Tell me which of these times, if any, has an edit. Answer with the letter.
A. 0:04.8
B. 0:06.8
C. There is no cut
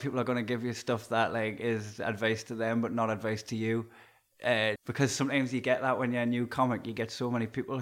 A